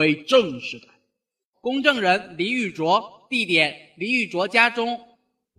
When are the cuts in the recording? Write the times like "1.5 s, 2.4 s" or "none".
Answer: 1.5 s